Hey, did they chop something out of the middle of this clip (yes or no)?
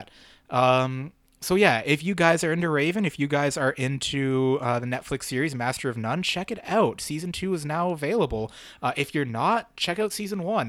no